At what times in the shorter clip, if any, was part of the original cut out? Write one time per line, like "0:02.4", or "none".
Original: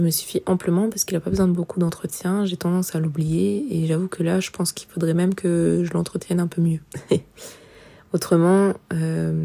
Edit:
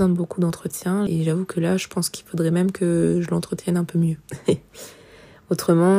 0:01.1

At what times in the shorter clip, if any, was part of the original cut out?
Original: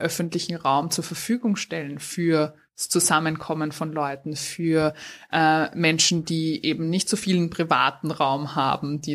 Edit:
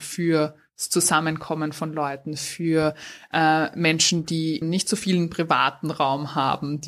0:04.6

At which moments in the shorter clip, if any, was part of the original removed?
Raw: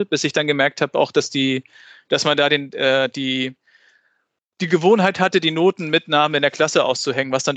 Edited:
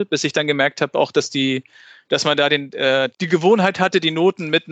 0:03.1

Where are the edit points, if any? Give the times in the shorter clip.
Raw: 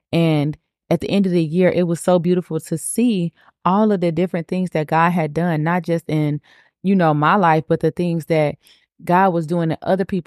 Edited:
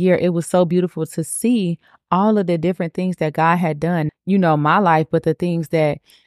0:04.1

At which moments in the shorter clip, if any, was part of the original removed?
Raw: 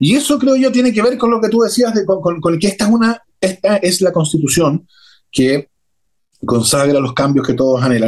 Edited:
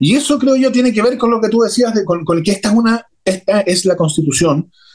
0:02.1

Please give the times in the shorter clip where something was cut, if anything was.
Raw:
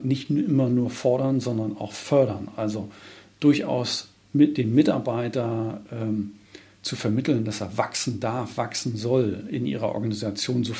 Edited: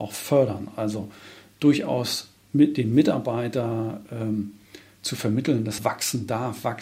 0:05.8

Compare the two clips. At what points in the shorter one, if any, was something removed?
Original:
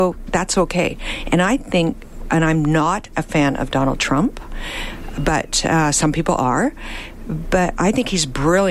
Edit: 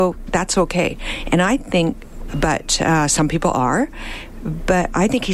0:02.3

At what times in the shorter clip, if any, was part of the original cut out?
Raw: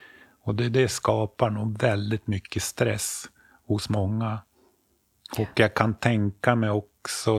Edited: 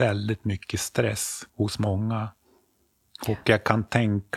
0:01.5

